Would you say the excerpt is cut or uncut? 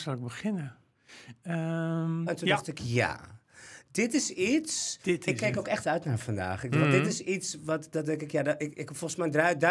cut